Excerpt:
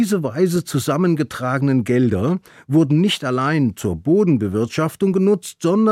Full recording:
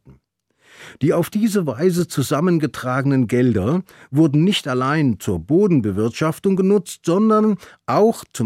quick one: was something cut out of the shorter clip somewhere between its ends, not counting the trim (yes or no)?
no